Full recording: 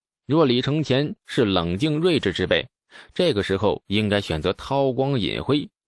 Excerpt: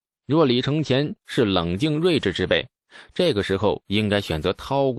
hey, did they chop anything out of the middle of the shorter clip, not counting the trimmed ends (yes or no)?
no